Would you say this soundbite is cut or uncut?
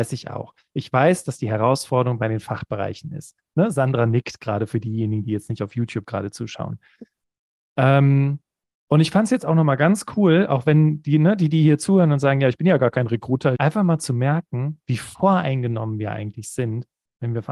cut